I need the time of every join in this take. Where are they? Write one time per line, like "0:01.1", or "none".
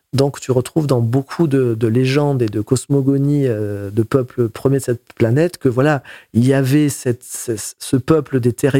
none